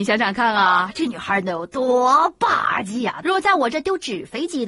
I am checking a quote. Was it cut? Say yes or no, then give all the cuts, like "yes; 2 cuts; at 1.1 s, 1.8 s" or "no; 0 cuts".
yes; 1 cut; at 3.2 s